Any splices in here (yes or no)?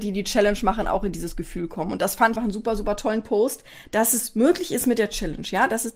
yes